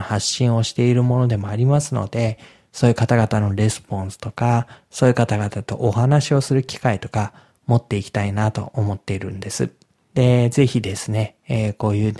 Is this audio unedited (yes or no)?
no